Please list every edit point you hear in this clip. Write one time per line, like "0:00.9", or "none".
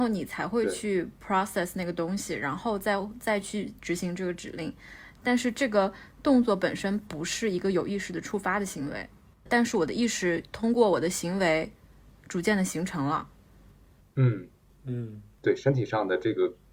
0:05.2
0:09.5